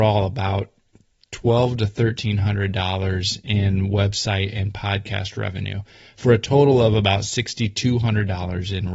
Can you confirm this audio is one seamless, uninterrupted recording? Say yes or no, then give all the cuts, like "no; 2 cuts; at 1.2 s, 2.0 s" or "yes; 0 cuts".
yes; 0 cuts